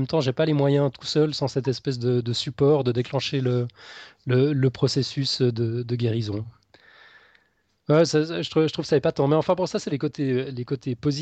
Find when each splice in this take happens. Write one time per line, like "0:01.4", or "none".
none

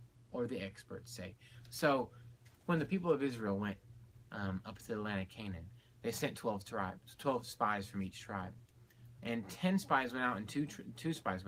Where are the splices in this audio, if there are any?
0:09.2

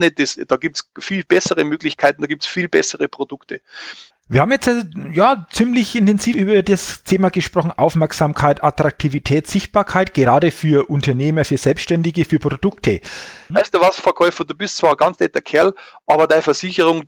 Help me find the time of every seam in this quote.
0:04.1
0:06.3
0:13.5

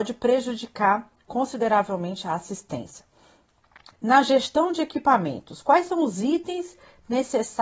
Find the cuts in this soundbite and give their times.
0:03.9

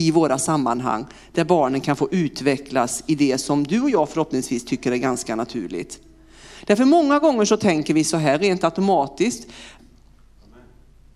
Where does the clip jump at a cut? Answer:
0:09.8

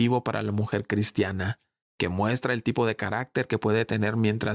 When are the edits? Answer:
none

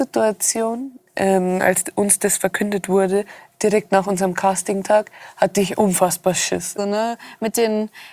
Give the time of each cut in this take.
0:01.6
0:06.8

